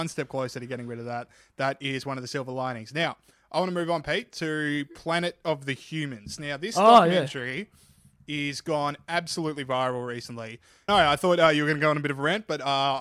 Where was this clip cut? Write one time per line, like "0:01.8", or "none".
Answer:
0:10.9